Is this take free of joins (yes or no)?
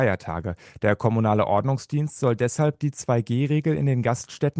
yes